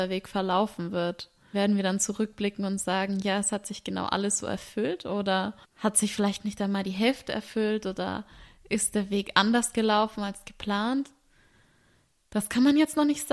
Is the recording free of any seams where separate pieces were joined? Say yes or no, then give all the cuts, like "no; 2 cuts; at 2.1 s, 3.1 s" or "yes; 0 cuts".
no; 2 cuts; at 1.5 s, 5.6 s